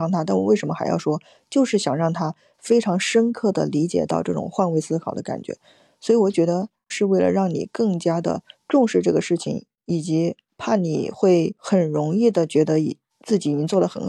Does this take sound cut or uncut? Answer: cut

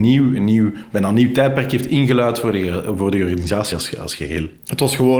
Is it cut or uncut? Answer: uncut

